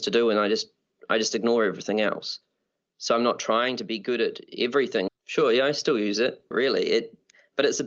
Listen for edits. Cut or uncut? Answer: cut